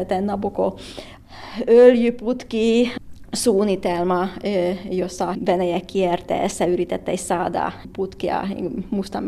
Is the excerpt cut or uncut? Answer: uncut